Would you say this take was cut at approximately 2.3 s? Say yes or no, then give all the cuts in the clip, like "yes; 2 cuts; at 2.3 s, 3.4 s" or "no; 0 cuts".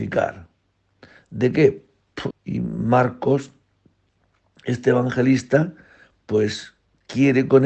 yes; 1 cut; at 2.3 s